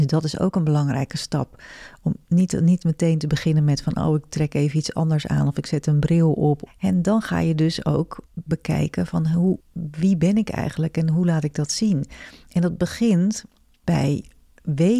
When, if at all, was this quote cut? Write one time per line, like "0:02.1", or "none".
0:06.7
0:08.3